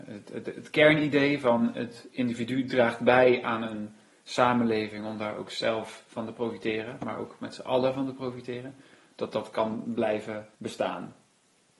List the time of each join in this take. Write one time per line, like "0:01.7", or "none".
0:10.5